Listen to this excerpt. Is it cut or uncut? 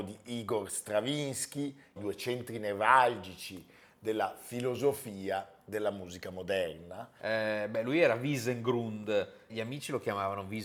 cut